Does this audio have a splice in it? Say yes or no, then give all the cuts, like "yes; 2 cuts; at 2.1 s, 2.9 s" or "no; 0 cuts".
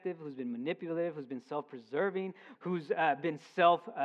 yes; 1 cut; at 2.5 s